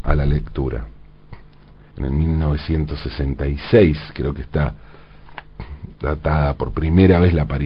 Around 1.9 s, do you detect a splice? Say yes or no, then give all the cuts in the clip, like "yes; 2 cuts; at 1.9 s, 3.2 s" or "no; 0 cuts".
yes; 1 cut; at 1.9 s